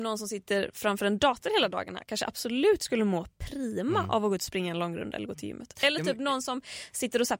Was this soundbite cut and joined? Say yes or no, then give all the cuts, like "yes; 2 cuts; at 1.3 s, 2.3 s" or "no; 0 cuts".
no; 0 cuts